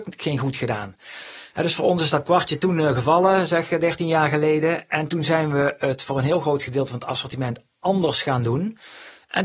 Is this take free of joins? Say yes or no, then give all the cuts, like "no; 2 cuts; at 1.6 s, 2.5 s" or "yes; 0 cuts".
yes; 0 cuts